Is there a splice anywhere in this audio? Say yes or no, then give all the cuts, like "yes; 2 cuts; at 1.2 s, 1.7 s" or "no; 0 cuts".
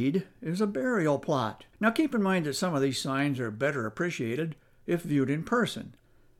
yes; 1 cut; at 1.7 s